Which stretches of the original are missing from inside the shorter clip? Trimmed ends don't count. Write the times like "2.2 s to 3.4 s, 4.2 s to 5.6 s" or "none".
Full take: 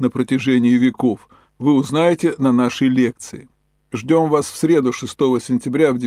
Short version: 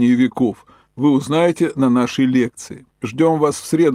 3.5 s to 3.8 s